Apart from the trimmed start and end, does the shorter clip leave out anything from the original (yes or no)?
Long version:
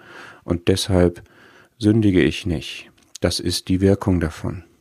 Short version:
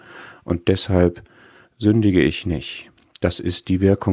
no